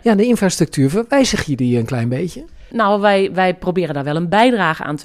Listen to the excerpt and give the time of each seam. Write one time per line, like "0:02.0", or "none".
none